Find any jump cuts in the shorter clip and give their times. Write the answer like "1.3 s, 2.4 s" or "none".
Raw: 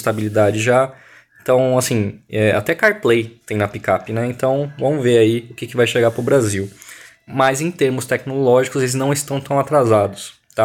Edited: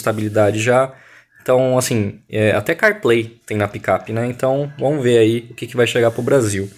none